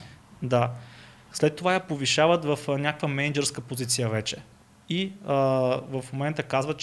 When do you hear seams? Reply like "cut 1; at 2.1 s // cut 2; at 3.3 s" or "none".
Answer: none